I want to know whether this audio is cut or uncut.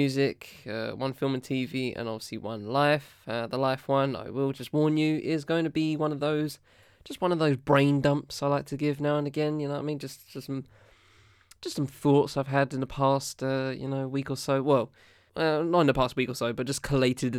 cut